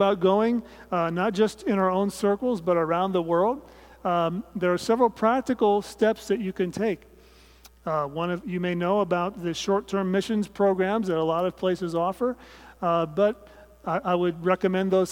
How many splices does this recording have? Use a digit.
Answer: 1